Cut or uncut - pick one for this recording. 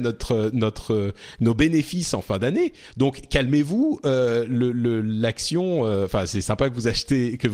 uncut